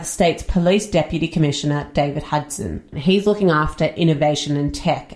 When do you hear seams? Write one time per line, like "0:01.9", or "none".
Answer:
0:02.9